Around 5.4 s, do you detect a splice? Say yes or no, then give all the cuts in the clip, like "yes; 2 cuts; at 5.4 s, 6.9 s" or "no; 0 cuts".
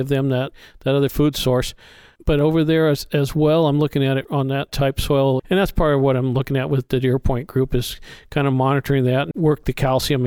yes; 2 cuts; at 5.4 s, 9.3 s